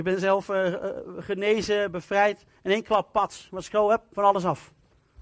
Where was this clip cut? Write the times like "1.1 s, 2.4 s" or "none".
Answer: none

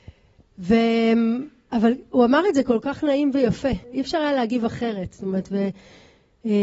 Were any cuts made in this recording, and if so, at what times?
3.8 s

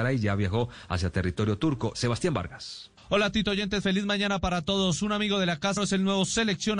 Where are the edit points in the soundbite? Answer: 1.9 s, 5.8 s

